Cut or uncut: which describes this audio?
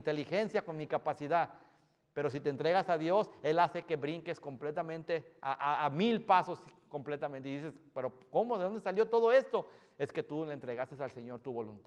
uncut